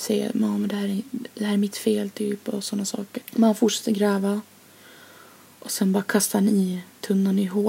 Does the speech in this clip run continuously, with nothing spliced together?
no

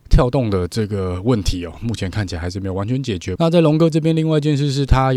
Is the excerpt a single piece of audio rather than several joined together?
no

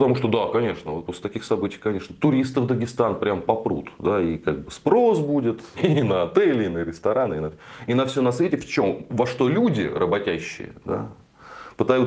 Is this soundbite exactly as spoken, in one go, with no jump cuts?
no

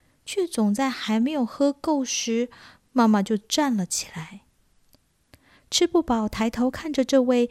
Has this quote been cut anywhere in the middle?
yes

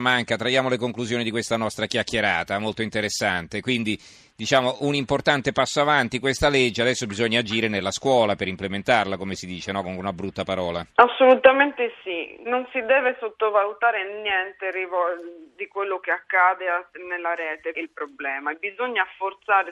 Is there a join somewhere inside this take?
yes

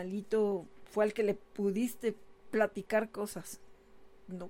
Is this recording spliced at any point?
no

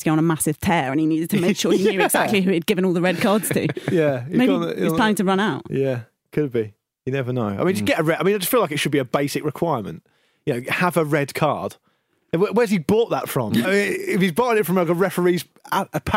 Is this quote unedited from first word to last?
no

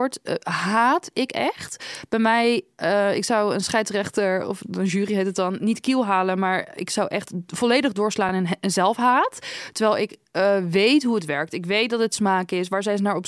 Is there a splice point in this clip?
no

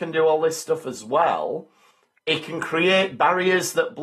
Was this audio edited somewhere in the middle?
yes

